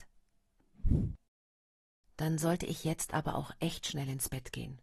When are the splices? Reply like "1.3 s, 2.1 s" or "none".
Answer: none